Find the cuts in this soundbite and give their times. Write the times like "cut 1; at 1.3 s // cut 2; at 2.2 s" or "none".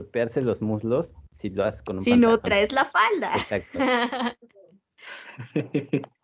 cut 1; at 1.3 s